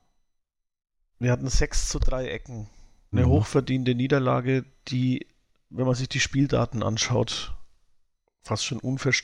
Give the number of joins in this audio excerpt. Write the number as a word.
one